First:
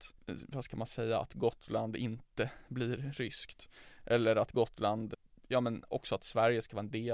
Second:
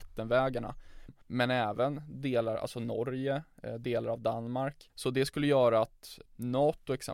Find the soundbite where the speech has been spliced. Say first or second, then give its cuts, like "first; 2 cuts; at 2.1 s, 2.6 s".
second; 2 cuts; at 1.1 s, 4.9 s